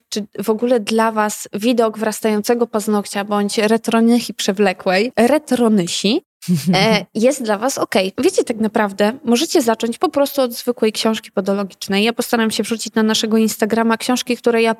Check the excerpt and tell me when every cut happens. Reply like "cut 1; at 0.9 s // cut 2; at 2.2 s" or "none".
cut 1; at 5.1 s // cut 2; at 8.2 s